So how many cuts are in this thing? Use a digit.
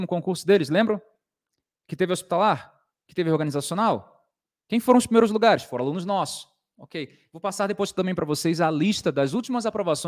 0